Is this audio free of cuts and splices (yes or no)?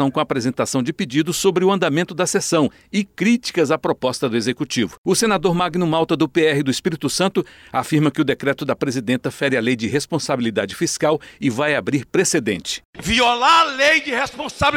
yes